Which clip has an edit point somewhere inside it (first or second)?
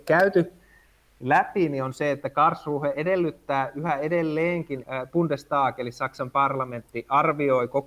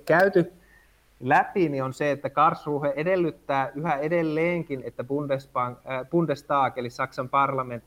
first